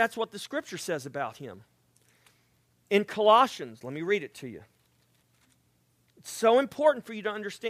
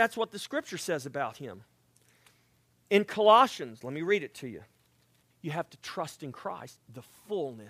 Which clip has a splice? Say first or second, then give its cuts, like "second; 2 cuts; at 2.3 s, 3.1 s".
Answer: second; 2 cuts; at 5.3 s, 6.8 s